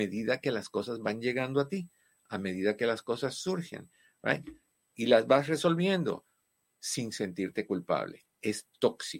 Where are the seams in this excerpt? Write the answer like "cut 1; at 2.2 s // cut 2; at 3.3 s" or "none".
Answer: cut 1; at 8.3 s

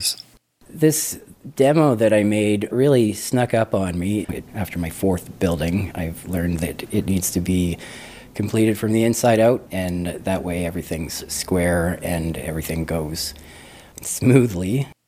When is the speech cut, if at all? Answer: cut 1; at 4.3 s // cut 2; at 9.7 s

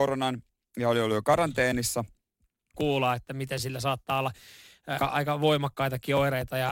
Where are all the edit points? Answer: cut 1; at 2.7 s // cut 2; at 5.0 s

